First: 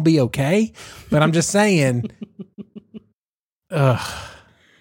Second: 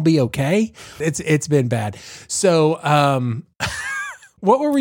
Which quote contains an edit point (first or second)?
second